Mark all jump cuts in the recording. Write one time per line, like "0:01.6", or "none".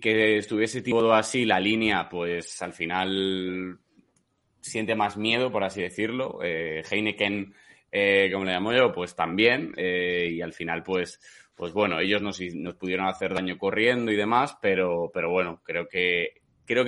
none